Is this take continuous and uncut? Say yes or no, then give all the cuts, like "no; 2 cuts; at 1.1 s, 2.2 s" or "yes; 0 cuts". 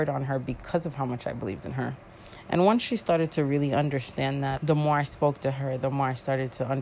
no; 1 cut; at 4.6 s